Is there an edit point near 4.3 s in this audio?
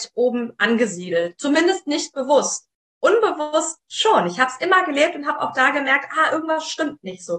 no; 0 cuts

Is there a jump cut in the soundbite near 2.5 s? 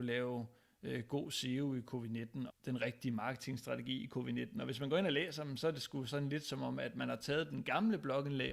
yes; 1 cut; at 2.5 s

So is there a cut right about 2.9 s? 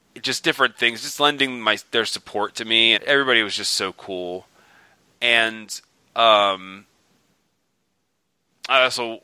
yes; 1 cut; at 2.9 s

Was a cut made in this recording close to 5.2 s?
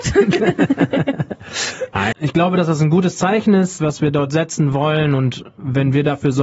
no; 1 cut; at 2.1 s

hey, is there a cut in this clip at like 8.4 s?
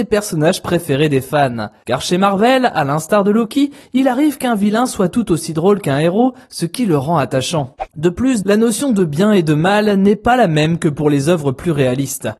yes; 1 cut; at 8.4 s

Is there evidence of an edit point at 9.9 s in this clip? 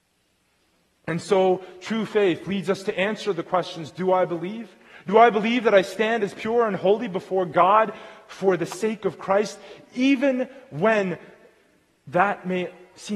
no; 1 cut; at 5.0 s

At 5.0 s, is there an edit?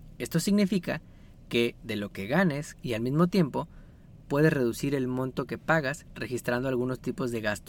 no; 1 cut; at 2.7 s

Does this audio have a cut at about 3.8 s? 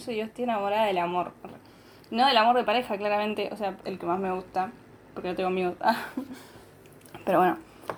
yes; 1 cut; at 3.8 s

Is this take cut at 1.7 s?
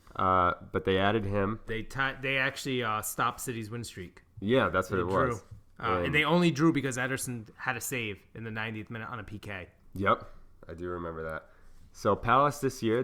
yes; 1 cut; at 1.7 s

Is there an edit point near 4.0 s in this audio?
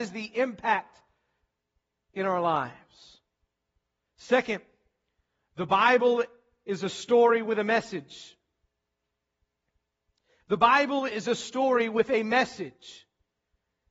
yes; 1 cut; at 4.0 s

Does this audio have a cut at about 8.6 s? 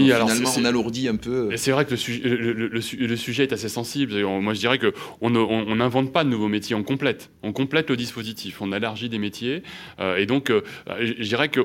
yes; 1 cut; at 8.6 s

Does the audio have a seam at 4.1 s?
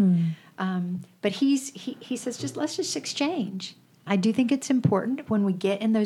yes; 1 cut; at 4.1 s

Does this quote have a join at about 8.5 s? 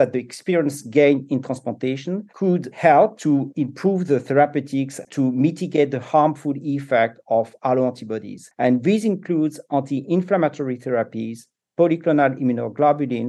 yes; 2 cuts; at 5.0 s, 8.5 s

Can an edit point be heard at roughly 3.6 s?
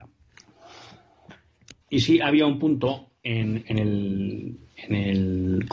yes; 2 cuts; at 1.8 s, 3.6 s

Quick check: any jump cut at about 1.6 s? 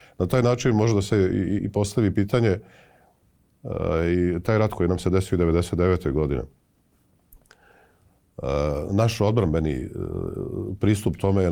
yes; 1 cut; at 1.6 s

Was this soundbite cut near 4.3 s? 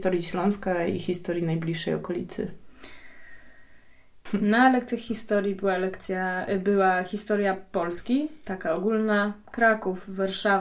yes; 1 cut; at 4.3 s

